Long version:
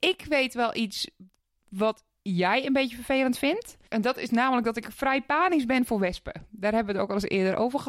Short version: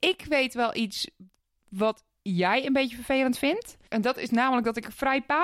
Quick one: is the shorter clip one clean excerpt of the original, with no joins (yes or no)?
yes